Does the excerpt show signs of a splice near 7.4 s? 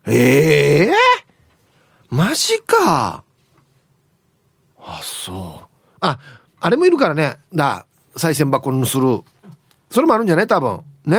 yes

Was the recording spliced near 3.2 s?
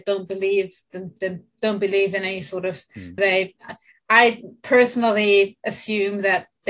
yes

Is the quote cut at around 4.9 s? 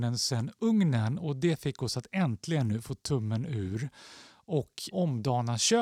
yes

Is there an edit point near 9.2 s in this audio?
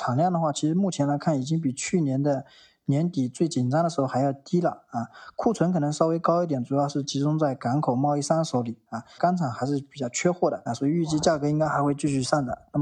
yes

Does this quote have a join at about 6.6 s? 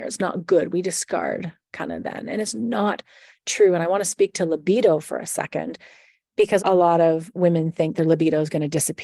yes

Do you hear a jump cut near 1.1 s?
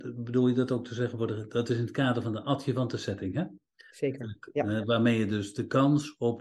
no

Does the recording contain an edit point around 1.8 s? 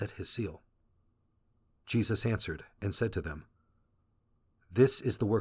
yes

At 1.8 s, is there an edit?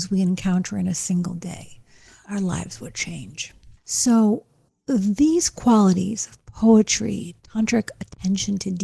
no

